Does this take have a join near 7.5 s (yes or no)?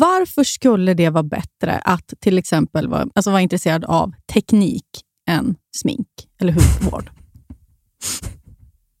no